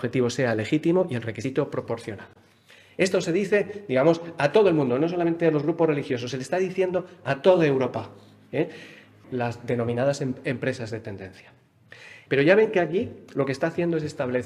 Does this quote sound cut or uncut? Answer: cut